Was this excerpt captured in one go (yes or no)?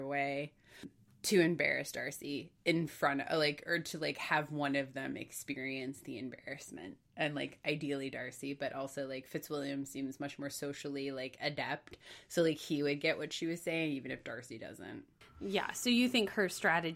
yes